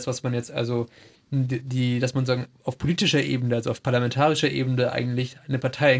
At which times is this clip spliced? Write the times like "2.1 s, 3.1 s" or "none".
none